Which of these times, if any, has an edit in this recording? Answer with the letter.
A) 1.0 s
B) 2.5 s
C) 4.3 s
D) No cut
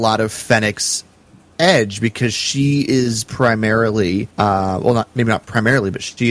C